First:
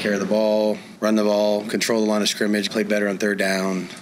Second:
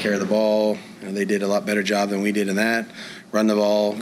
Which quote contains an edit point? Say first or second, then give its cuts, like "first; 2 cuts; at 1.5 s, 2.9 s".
first; 2 cuts; at 1.0 s, 2.7 s